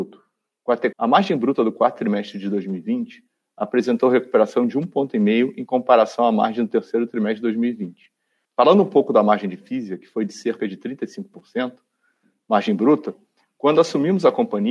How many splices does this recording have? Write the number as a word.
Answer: two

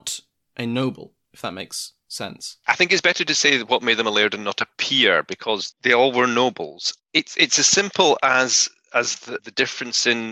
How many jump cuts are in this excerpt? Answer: one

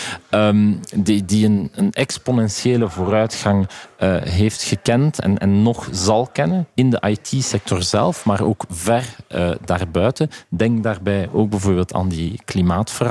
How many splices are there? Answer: zero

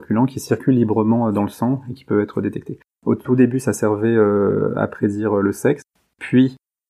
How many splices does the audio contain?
one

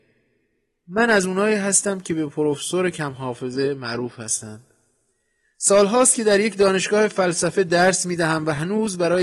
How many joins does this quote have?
zero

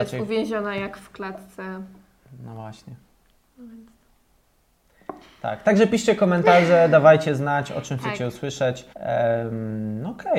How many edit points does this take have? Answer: one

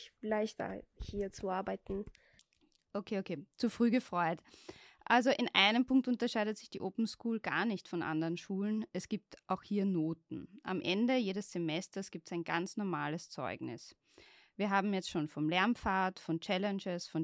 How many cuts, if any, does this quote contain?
zero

